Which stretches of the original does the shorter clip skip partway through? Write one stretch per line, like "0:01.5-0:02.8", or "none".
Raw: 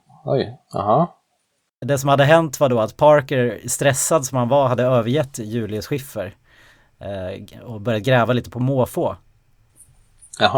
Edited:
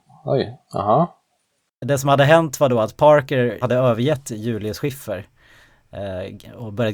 0:03.6-0:04.7